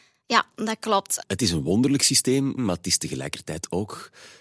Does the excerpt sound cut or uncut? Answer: cut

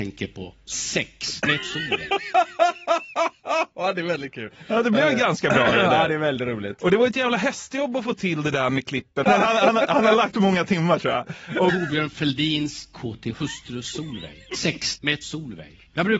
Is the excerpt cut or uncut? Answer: cut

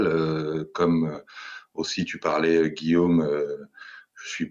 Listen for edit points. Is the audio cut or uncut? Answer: uncut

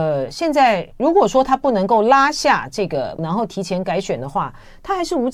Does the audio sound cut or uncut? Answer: cut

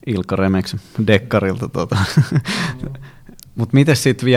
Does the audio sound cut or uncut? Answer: uncut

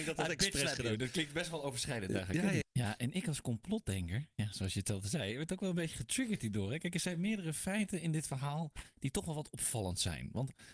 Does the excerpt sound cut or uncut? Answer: cut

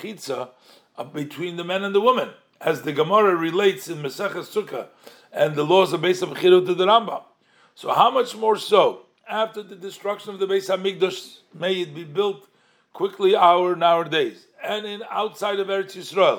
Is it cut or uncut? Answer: uncut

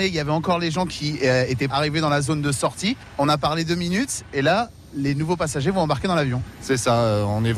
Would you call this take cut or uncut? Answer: cut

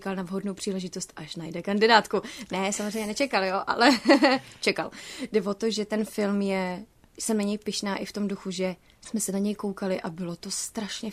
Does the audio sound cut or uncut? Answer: uncut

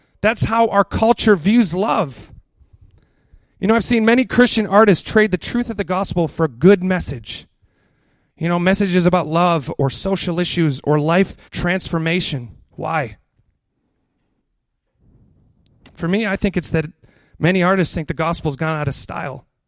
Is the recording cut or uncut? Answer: cut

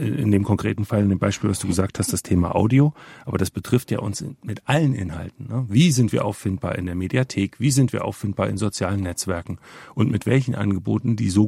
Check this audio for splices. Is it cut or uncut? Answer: uncut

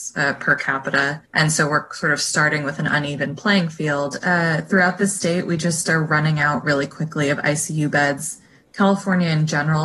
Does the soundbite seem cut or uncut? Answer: cut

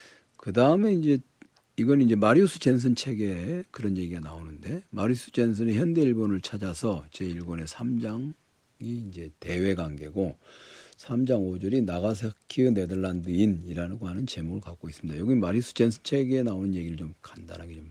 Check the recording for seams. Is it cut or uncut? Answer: uncut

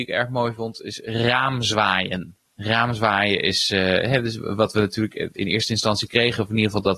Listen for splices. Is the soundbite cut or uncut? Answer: cut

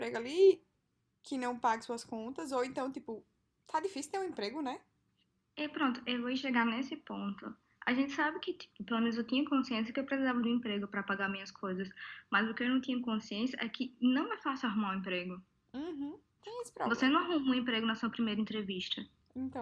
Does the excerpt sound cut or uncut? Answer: uncut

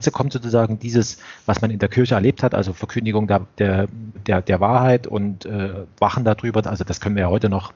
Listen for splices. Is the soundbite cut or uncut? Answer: cut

